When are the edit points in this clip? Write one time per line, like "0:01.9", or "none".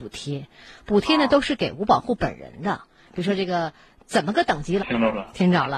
0:03.1
0:04.8